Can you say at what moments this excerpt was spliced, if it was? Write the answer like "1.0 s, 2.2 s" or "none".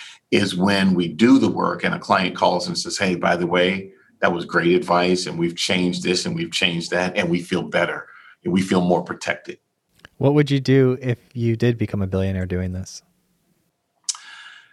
none